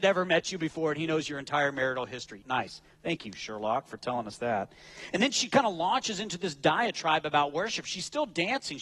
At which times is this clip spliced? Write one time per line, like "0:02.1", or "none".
0:02.4